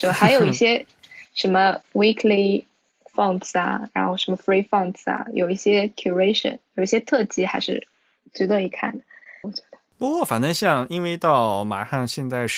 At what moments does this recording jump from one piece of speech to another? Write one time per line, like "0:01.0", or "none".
0:09.4